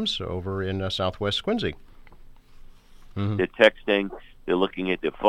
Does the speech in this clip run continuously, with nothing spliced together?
no; 1 cut; at 3.1 s

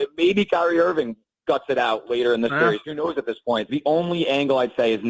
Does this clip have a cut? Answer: yes; 1 cut; at 3.7 s

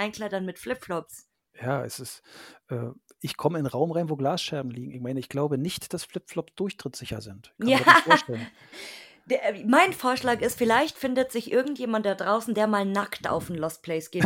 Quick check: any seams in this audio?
no; 0 cuts

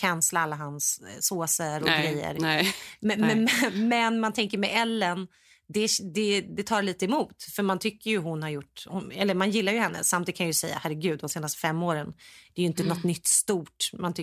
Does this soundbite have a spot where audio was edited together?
no; 0 cuts

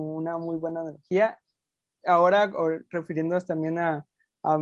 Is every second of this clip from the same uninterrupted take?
yes; 0 cuts

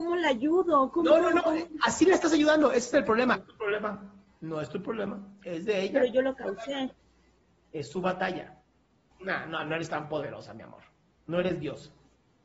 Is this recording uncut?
no; 2 cuts; at 3.3 s, 9.1 s

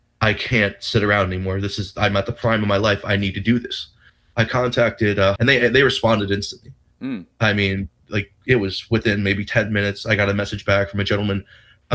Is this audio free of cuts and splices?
no; 1 cut; at 5.4 s

